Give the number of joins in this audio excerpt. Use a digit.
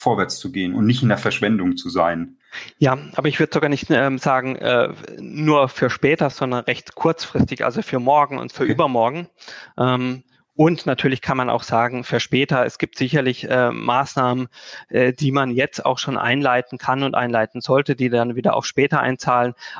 0